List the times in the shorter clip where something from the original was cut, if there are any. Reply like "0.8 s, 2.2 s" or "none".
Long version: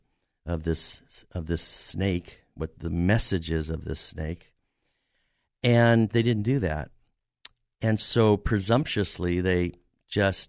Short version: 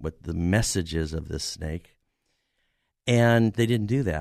none